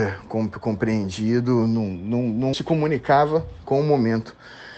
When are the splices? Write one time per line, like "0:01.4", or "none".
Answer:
0:02.5